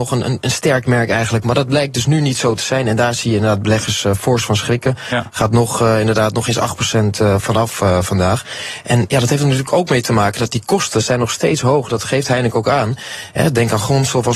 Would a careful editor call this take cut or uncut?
cut